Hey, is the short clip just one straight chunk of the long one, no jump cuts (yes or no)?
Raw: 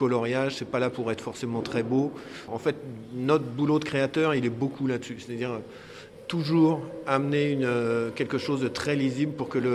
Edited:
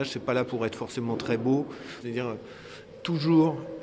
no